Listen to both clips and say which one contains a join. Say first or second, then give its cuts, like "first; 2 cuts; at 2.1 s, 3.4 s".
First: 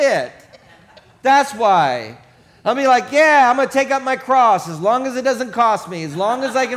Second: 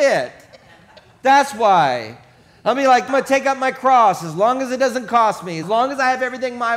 second; 2 cuts; at 3.1 s, 5.6 s